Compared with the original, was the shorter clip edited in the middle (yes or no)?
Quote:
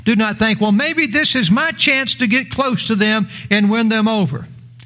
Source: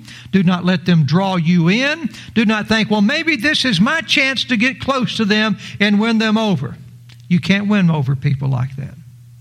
no